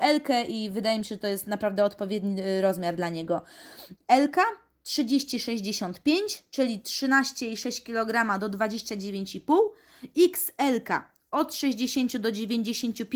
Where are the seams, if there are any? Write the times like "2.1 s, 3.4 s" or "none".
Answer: 4.0 s